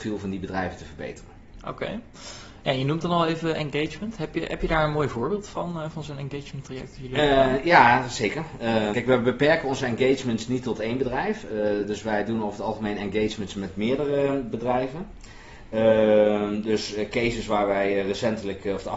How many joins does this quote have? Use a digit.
1